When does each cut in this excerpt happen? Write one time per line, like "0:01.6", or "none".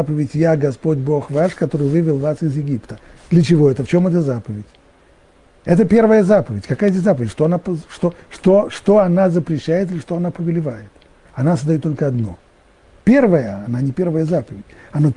0:11.3
0:13.0